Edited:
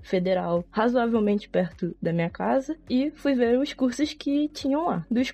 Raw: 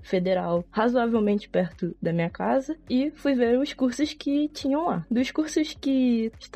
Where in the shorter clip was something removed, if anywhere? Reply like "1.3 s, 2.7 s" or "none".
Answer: none